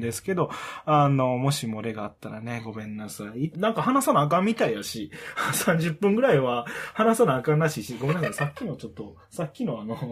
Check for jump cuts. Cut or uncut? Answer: cut